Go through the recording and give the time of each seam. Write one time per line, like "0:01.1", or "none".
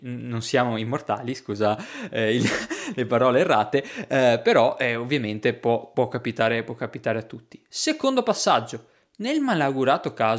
none